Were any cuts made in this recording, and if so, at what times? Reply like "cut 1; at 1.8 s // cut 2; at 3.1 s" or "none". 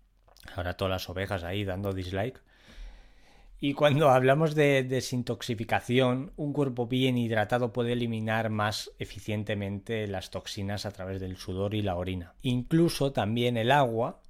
none